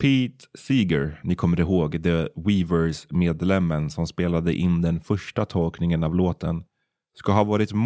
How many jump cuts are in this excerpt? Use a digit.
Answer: 0